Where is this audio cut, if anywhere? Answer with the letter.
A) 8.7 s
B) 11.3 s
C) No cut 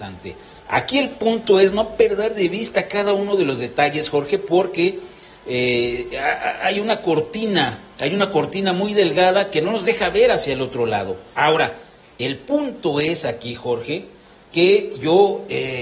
B